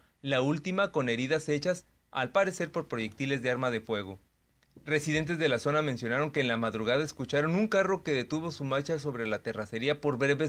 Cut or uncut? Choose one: uncut